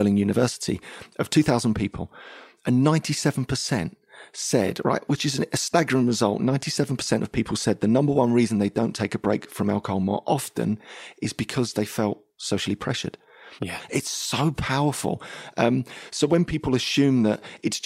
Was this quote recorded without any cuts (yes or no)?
no